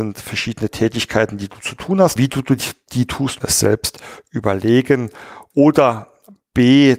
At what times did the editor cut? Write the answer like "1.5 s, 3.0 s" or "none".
2.2 s, 3.4 s